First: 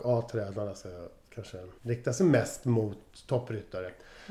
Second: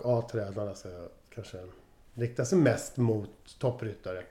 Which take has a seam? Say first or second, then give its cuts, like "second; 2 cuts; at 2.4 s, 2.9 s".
first; 1 cut; at 1.8 s